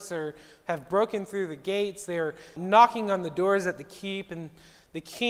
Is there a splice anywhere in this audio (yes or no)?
yes